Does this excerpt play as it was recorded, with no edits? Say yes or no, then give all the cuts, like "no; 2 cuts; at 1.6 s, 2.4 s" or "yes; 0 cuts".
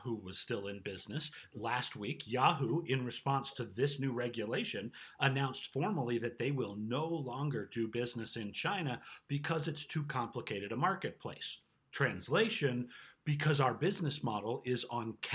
yes; 0 cuts